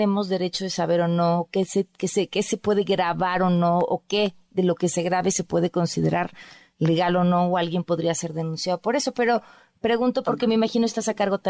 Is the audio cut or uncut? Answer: uncut